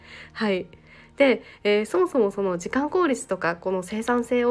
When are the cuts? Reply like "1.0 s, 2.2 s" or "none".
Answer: none